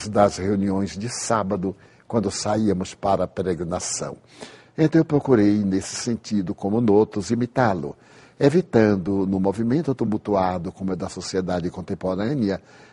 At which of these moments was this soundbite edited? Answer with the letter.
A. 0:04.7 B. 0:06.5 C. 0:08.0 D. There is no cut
A